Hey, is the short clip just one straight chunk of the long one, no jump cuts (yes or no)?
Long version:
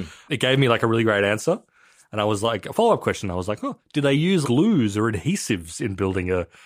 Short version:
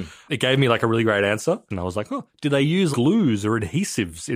no